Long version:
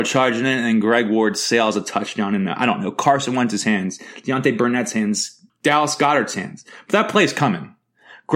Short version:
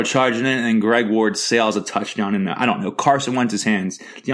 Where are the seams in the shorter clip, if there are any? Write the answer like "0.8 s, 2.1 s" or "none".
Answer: none